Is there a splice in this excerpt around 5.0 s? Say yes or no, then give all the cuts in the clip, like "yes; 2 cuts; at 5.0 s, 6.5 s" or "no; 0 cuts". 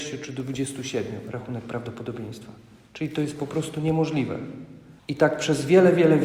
yes; 1 cut; at 5.0 s